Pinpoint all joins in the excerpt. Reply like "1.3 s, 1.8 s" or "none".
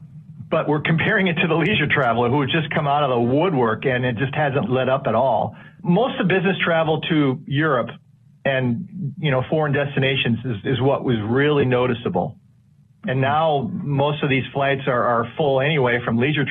none